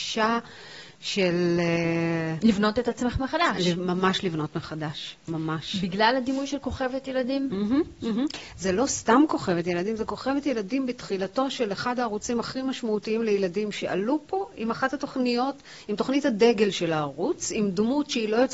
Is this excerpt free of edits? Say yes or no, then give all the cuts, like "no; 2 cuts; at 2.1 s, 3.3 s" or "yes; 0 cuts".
yes; 0 cuts